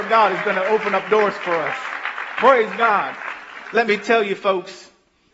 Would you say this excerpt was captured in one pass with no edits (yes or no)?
no